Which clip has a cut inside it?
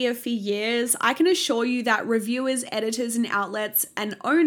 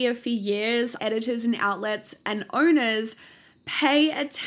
second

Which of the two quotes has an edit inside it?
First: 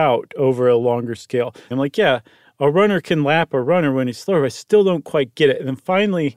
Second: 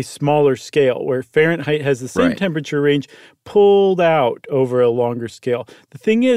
first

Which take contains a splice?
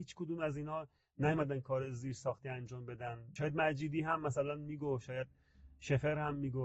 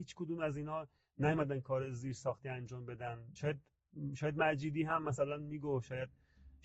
first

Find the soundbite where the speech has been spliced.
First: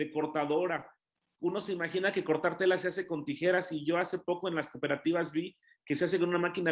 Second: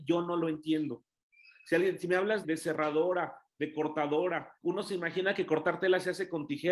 second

